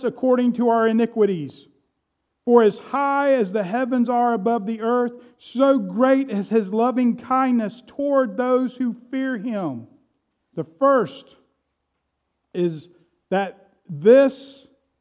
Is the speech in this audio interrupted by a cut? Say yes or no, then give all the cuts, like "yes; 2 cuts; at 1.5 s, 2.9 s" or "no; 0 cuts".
yes; 1 cut; at 10.5 s